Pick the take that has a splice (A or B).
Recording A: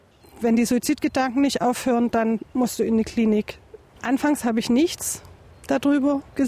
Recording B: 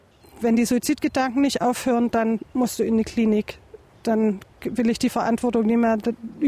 A